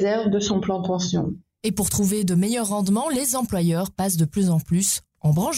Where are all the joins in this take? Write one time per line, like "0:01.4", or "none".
none